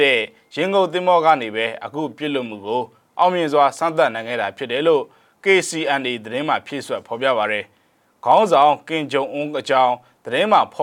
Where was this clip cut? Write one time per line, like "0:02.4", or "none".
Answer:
none